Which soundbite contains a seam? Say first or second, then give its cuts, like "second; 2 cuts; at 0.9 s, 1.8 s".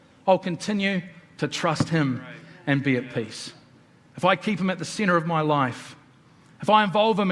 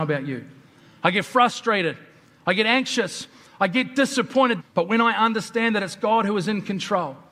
second; 1 cut; at 4.6 s